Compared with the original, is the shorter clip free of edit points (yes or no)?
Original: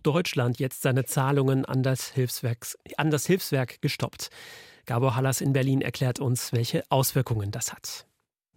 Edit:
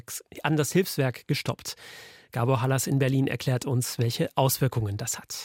yes